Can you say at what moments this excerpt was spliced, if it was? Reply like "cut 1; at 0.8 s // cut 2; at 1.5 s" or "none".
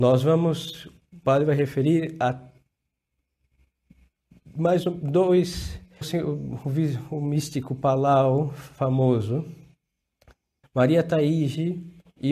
cut 1; at 6.0 s // cut 2; at 10.6 s